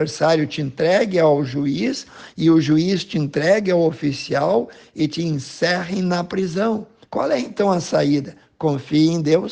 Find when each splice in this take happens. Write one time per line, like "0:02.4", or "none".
0:07.0